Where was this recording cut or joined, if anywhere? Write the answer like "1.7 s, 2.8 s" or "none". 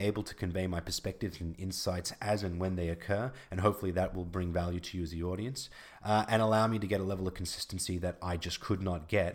none